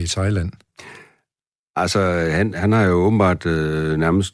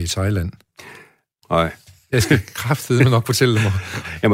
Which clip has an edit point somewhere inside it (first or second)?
second